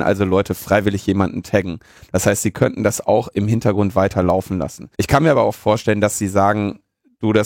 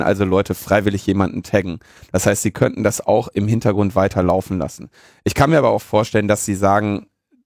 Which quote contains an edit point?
first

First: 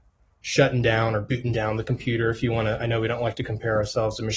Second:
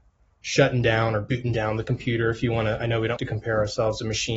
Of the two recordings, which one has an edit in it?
second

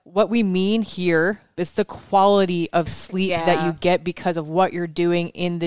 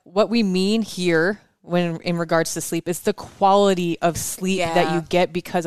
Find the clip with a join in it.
first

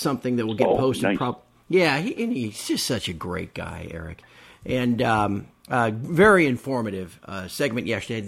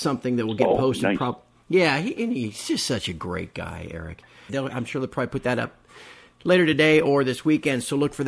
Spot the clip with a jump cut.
second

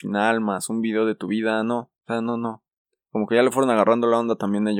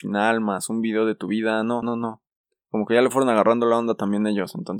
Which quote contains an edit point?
second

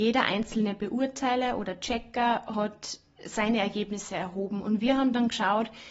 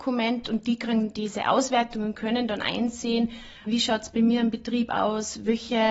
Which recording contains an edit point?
second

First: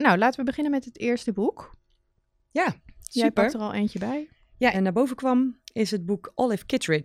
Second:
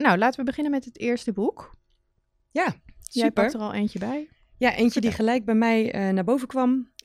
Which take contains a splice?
first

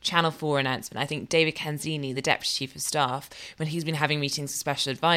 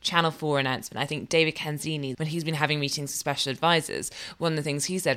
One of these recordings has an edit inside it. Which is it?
second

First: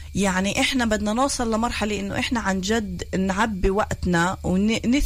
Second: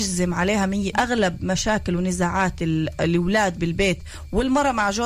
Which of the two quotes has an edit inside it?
second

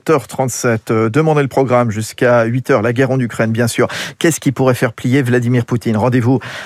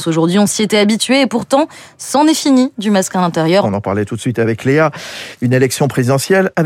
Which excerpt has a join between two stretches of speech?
second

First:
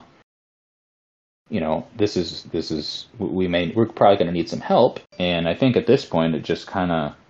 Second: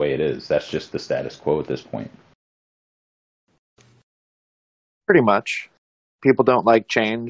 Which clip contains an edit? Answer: first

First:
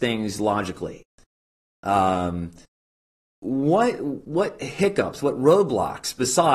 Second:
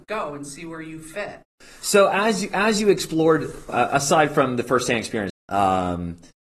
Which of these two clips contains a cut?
second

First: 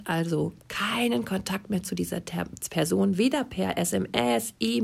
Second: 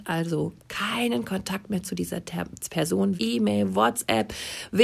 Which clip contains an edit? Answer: second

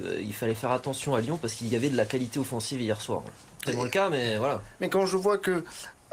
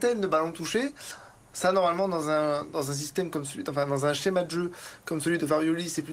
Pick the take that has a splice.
first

